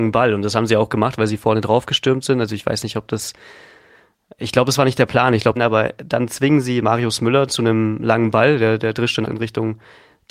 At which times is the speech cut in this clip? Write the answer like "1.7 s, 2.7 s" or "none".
5.6 s, 9.2 s